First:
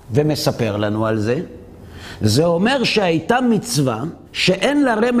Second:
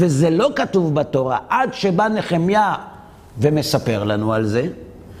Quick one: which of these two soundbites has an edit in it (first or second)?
first